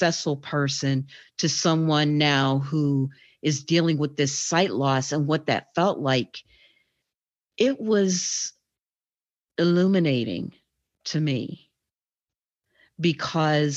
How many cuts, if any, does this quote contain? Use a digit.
0